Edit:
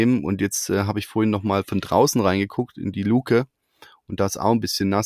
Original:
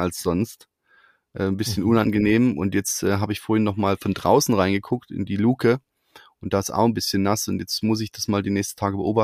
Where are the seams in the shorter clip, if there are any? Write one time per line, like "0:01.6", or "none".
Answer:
none